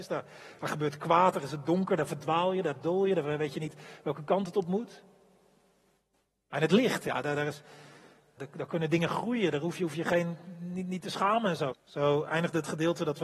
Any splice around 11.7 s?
yes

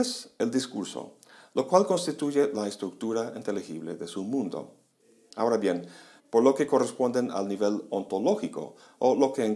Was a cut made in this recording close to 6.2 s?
yes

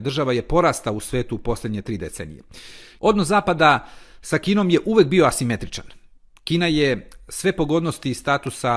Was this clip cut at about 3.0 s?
yes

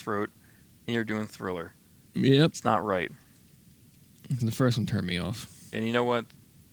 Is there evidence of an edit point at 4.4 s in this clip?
yes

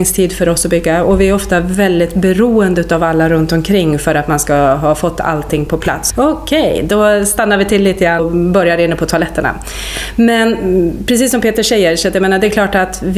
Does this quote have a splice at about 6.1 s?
yes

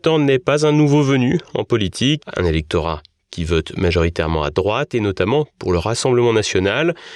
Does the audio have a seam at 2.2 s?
yes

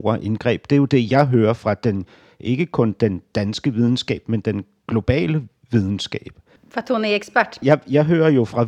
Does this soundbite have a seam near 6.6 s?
yes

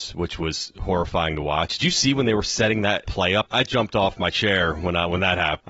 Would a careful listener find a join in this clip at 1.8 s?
no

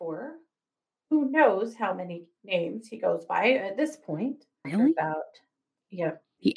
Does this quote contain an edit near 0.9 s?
no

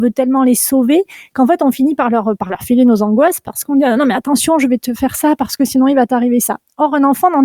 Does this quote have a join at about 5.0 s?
yes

